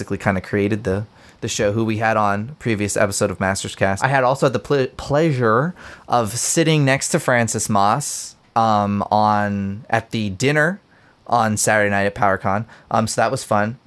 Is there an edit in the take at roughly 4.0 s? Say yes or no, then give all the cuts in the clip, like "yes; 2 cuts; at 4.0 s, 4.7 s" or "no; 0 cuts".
yes; 1 cut; at 4.0 s